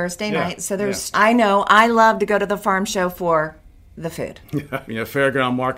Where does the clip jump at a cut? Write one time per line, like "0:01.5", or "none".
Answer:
0:01.1
0:04.9